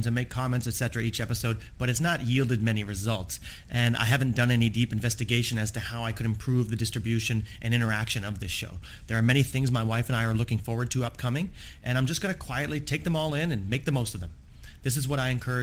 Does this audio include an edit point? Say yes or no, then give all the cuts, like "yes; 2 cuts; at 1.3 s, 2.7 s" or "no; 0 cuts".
yes; 1 cut; at 9.0 s